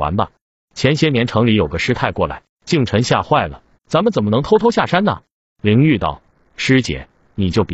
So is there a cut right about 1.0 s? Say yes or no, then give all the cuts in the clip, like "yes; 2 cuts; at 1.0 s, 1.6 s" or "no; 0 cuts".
no; 2 cuts; at 2.5 s, 3.7 s